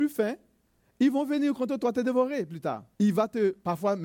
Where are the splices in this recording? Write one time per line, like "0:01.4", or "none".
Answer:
0:03.0